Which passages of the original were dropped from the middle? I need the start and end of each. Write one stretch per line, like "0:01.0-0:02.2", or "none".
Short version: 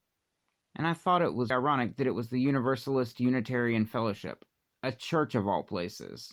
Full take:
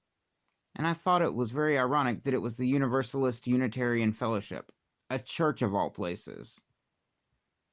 0:01.5-0:01.8